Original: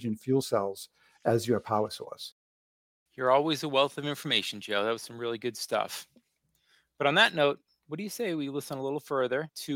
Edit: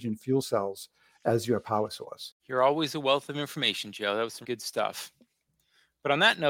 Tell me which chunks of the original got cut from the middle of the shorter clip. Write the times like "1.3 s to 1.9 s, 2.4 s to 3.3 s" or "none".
2.4 s to 3.1 s, 5.1 s to 5.4 s